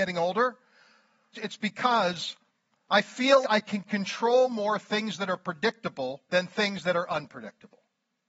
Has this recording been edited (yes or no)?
yes